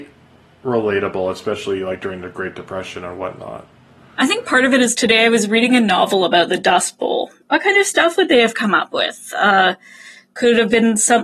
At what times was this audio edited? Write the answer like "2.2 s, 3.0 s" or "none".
7.4 s